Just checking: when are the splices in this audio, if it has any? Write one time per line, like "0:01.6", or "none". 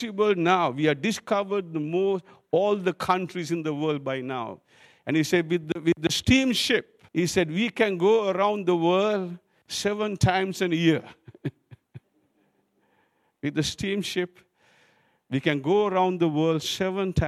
0:07.1